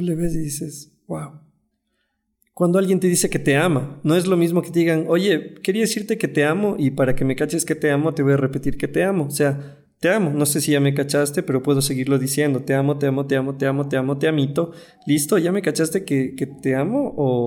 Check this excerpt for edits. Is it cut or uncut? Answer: uncut